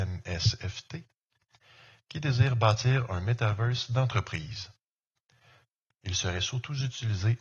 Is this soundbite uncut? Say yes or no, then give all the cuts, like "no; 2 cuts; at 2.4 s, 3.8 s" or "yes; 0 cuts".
no; 1 cut; at 5.9 s